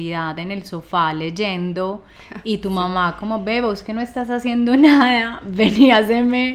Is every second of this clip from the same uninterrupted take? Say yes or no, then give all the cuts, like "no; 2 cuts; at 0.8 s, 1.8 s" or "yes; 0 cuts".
yes; 0 cuts